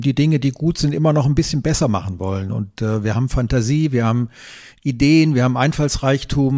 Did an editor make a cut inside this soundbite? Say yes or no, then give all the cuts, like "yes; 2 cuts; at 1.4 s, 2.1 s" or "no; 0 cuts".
no; 0 cuts